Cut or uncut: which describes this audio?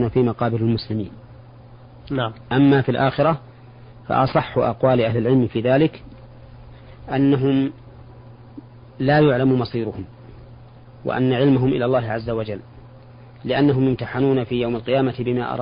uncut